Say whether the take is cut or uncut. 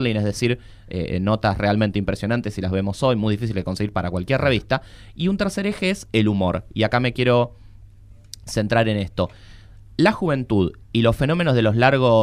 uncut